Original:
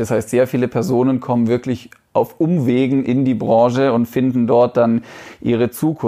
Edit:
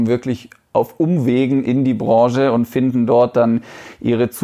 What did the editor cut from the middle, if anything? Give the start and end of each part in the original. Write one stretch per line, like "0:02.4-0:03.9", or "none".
none